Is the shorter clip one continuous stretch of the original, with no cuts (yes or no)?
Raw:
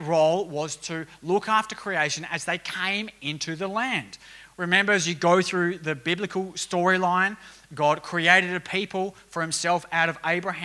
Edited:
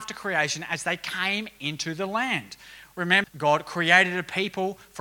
no